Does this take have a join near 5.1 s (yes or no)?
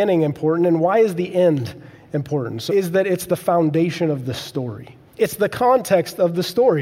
yes